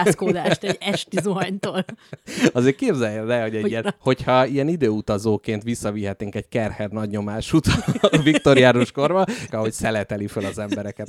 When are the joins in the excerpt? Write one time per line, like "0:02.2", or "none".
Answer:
0:03.8
0:09.5